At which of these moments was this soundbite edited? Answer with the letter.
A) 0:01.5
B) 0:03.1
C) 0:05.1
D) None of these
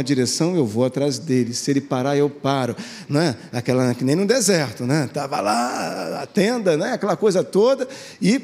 D